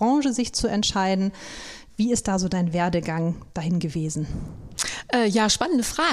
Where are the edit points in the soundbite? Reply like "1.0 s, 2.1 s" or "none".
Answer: none